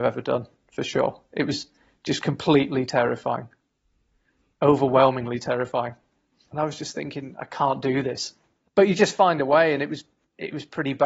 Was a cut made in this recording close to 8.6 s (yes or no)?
no